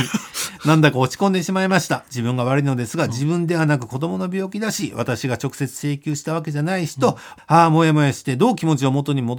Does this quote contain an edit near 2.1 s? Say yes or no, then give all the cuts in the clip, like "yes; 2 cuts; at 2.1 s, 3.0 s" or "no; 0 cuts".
no; 1 cut; at 7.4 s